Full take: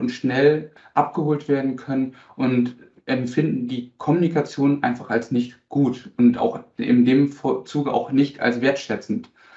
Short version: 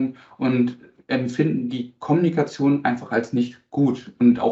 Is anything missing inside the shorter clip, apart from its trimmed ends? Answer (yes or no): no